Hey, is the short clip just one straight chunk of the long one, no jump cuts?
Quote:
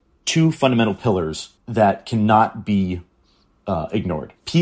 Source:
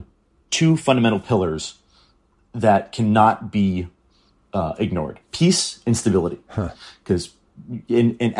no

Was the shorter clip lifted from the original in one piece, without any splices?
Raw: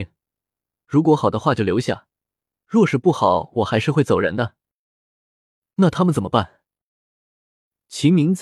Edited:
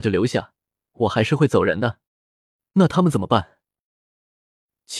no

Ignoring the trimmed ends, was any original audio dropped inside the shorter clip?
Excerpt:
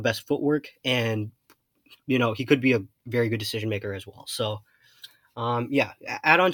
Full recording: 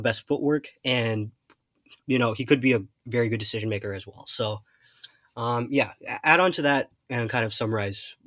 no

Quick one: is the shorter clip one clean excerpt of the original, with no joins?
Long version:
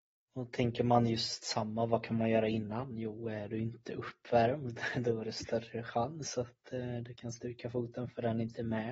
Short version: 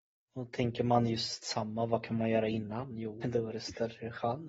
no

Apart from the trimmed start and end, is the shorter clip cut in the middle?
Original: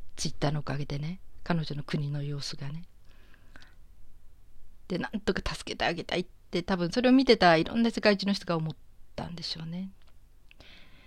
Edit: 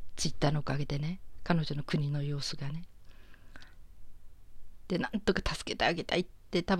no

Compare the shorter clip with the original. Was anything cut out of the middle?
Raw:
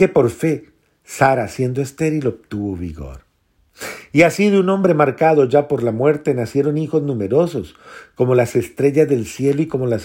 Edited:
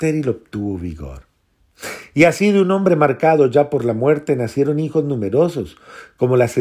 no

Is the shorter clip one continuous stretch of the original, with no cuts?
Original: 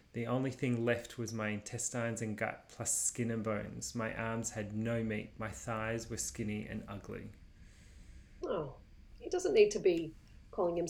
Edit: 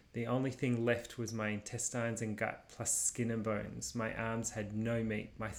yes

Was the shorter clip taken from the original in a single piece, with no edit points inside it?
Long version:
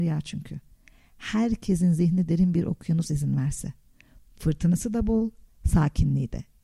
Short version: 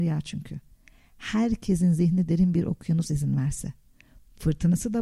yes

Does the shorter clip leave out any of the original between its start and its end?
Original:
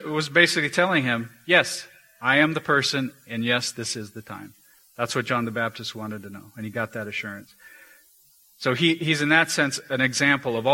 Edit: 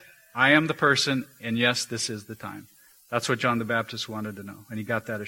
no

